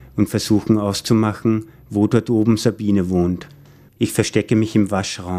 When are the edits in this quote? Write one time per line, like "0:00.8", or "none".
0:03.9